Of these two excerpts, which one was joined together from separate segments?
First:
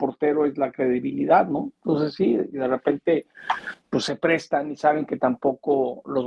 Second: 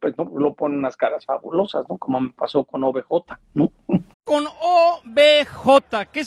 second; 1 cut; at 4.1 s

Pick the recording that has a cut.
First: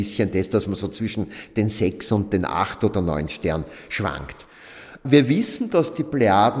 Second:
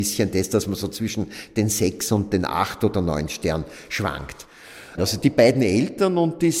second; 1 cut; at 5.0 s

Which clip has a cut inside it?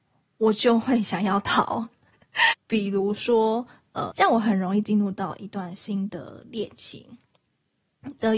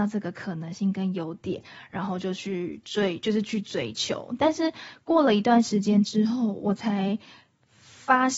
first; 2 cuts; at 2.5 s, 4.1 s

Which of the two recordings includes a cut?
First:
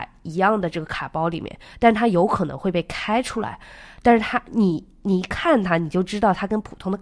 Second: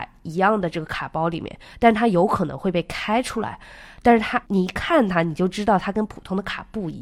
second; 1 cut; at 4.4 s

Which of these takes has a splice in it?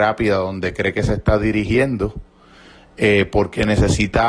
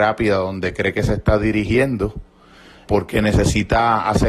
second; 1 cut; at 2.9 s

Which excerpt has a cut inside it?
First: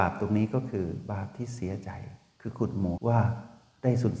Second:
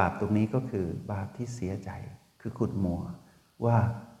first; 1 cut; at 3.0 s

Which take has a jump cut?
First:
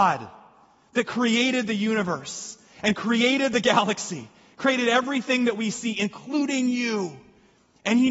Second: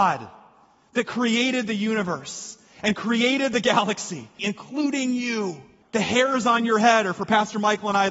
second; 2 cuts; at 4.4 s, 5.8 s

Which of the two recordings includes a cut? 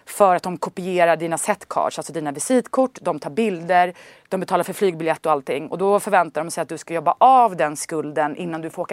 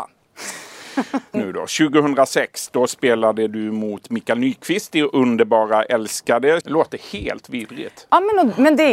second; 2 cuts; at 1.3 s, 6.6 s

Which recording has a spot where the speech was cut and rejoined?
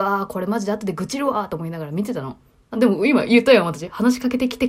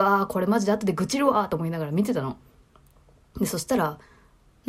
first; 1 cut; at 2.7 s

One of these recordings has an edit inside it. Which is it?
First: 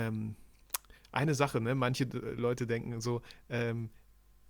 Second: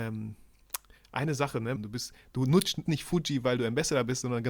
second; 2 cuts; at 1.8 s, 2.9 s

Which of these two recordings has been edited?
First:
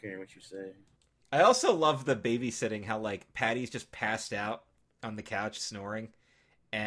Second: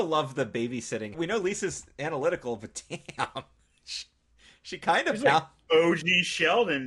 second; 1 cut; at 1.1 s

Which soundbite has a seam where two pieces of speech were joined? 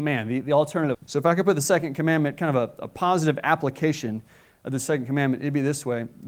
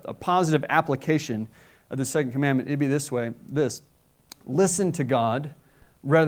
first; 1 cut; at 0.9 s

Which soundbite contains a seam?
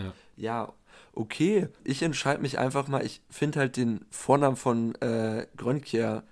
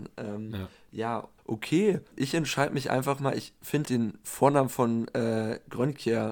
second; 2 cuts; at 1.4 s, 3.9 s

